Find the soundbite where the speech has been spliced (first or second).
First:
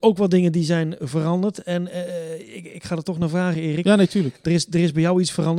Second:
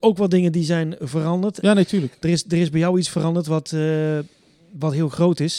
second